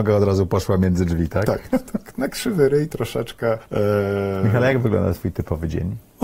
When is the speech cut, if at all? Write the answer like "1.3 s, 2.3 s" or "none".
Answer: 1.7 s